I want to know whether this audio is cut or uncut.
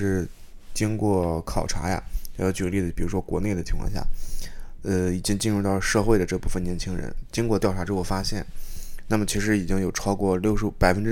uncut